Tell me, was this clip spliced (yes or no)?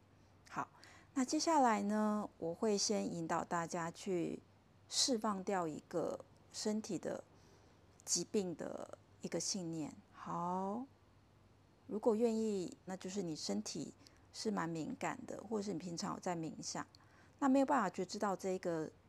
yes